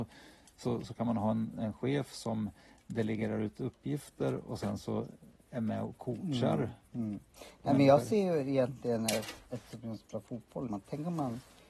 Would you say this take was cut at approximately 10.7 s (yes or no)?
yes